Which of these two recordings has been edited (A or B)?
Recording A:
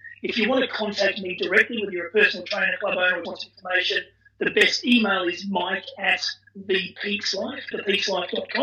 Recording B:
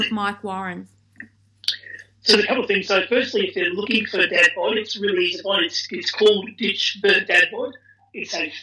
A